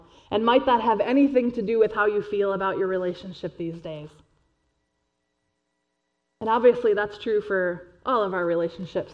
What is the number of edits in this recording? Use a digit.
0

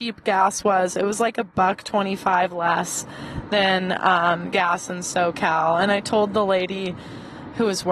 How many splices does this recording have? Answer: 0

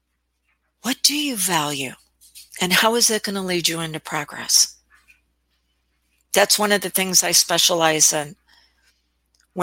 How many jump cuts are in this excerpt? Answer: 1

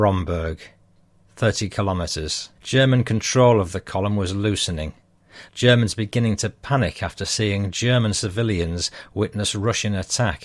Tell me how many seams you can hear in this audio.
2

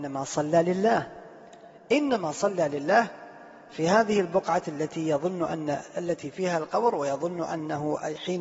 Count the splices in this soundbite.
0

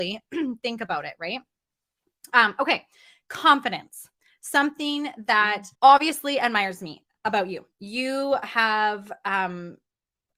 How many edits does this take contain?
1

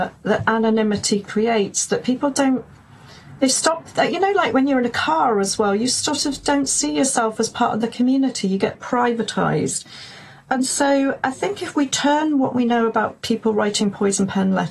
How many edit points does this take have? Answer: 1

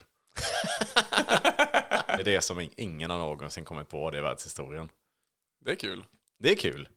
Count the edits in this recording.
1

